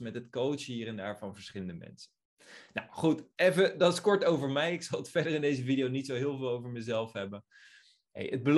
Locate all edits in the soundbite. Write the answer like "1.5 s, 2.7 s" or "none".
none